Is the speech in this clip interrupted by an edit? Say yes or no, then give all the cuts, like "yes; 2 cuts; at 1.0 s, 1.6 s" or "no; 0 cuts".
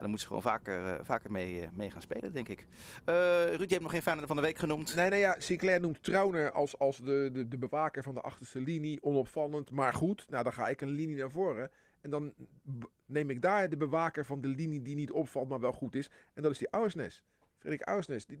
no; 0 cuts